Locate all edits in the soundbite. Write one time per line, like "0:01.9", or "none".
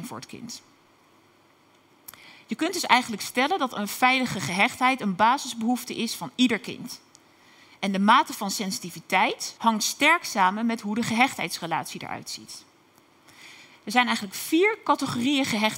0:09.6